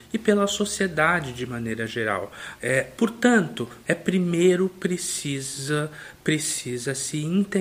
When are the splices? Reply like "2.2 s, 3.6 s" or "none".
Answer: 2.6 s, 3.8 s